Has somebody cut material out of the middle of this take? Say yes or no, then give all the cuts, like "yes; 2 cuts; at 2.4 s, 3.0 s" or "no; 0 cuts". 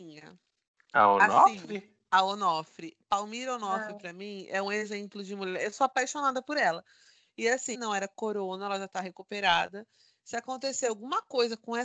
yes; 1 cut; at 7.7 s